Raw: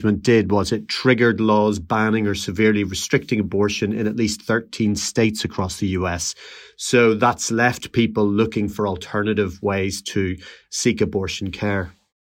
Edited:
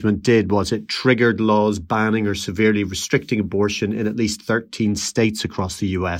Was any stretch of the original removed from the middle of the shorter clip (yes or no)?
no